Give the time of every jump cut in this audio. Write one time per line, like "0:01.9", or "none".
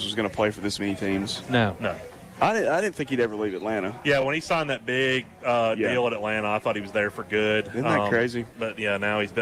none